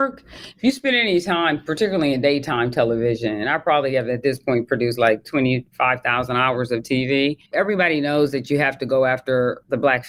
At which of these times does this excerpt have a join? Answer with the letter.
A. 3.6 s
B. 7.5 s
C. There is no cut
B